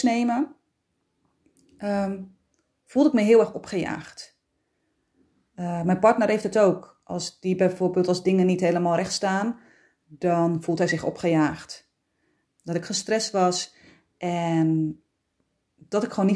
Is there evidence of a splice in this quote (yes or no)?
yes